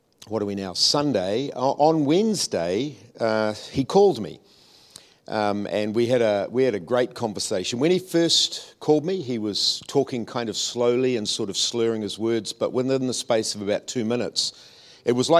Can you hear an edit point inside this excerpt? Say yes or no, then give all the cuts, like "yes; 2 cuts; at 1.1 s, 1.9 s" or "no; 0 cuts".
no; 0 cuts